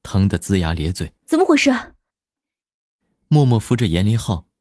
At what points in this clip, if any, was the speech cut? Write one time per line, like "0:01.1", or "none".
0:01.2